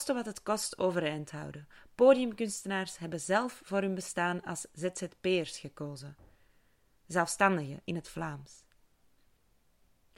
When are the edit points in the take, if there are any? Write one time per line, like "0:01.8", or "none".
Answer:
none